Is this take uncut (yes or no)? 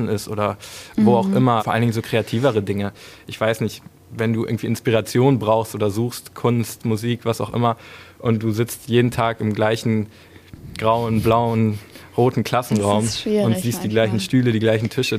no